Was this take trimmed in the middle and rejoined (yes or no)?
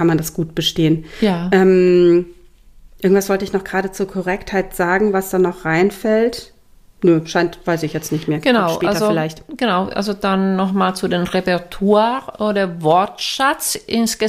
no